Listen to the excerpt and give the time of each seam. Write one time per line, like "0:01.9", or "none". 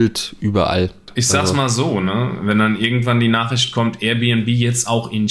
none